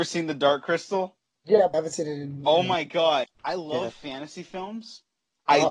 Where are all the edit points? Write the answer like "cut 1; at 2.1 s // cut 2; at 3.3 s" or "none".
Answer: cut 1; at 1.7 s // cut 2; at 3.2 s